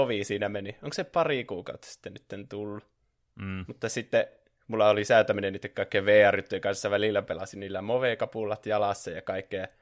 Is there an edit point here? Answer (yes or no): no